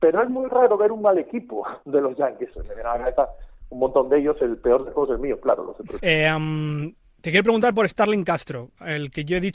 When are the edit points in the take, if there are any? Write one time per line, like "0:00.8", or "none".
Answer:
0:02.5
0:06.0